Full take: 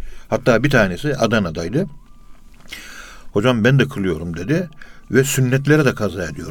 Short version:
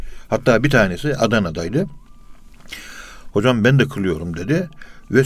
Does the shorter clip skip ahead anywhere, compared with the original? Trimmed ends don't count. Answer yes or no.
no